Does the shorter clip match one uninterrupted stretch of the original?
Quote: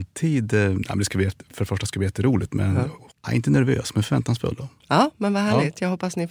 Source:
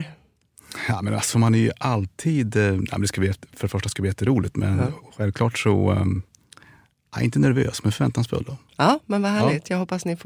no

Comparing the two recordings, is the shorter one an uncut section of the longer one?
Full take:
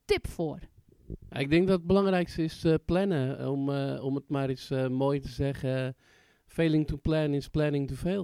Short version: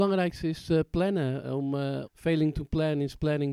no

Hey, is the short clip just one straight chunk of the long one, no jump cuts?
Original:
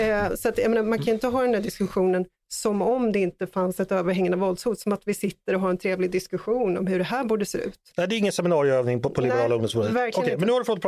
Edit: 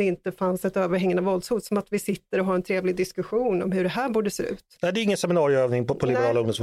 yes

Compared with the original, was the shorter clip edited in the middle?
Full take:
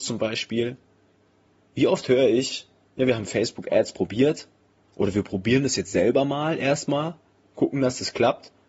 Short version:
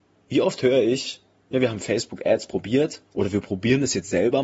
yes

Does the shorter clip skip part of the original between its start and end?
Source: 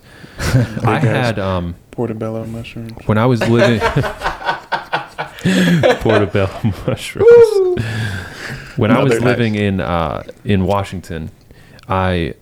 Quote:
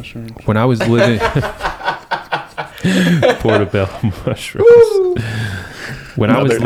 no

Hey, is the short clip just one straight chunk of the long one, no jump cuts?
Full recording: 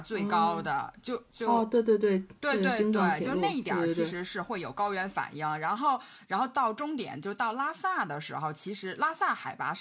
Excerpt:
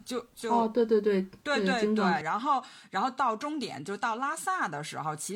no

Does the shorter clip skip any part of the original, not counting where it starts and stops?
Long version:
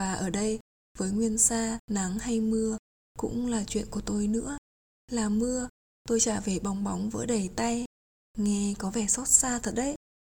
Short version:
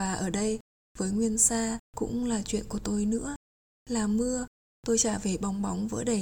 yes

